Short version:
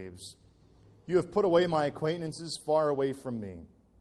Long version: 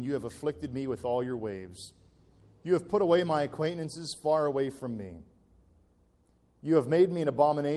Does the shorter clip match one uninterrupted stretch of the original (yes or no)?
yes